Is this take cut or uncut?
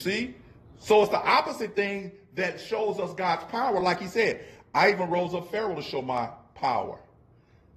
uncut